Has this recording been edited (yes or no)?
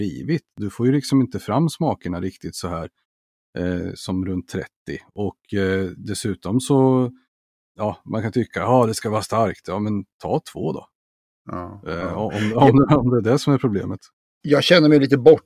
no